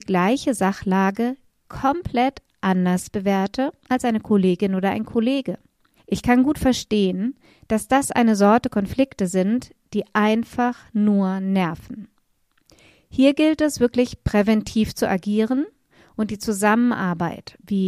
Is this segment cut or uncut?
cut